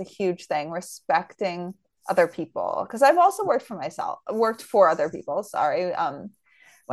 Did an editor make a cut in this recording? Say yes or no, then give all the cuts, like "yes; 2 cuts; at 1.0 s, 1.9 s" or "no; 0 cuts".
no; 0 cuts